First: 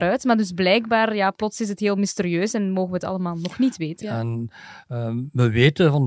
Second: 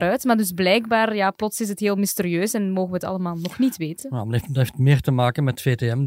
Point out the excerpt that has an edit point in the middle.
first; 1 cut; at 4.0 s

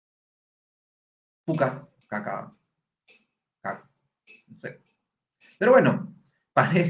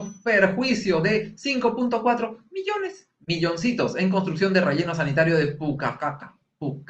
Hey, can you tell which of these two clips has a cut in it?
first; 1 cut; at 2.0 s

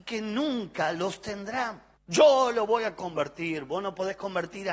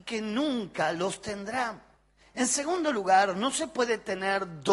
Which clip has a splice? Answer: first; 1 cut; at 2.0 s

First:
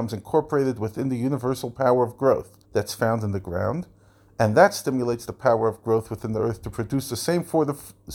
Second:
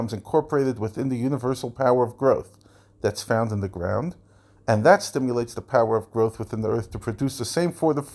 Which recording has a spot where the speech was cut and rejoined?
first; 1 cut; at 2.6 s

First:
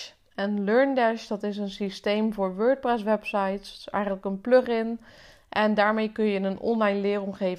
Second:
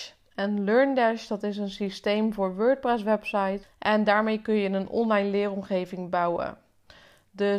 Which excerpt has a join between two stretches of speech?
second; 1 cut; at 3.6 s

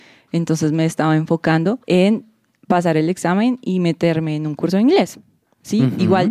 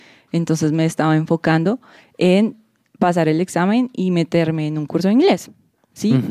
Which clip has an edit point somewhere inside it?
first; 1 cut; at 1.8 s

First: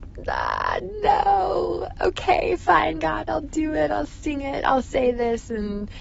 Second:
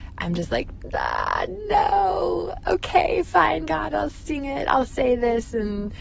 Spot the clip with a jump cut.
second; 1 cut; at 3.9 s

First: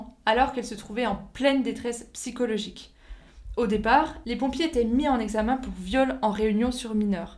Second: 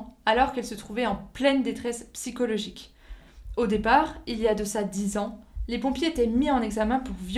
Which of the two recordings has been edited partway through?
first; 1 cut; at 4.2 s

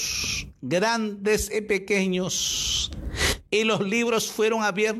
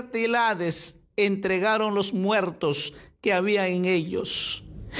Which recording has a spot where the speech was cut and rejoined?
first; 1 cut; at 3.5 s

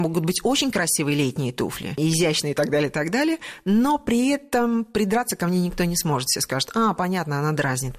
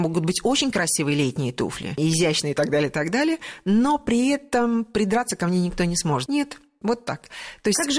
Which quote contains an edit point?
second; 1 cut; at 6.3 s

